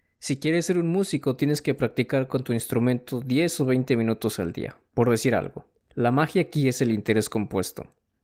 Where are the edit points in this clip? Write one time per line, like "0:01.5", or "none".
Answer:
none